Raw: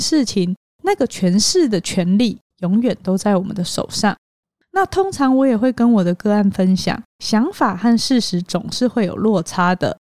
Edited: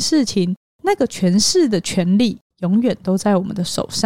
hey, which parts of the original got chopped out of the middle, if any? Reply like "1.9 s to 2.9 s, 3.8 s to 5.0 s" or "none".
none